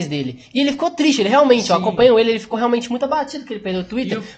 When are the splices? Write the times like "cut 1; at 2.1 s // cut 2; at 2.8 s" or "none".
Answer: none